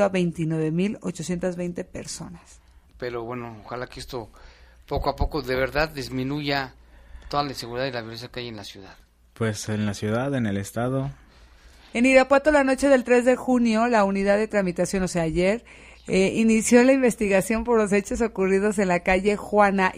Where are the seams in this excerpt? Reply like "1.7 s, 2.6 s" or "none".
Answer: 2.9 s, 11.9 s